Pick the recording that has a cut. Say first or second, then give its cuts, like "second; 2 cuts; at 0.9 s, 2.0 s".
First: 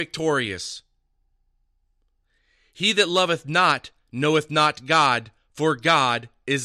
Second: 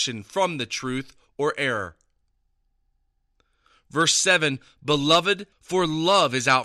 second; 1 cut; at 5.5 s